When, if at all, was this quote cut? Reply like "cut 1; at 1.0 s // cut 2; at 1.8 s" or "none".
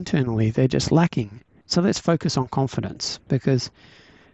cut 1; at 1.6 s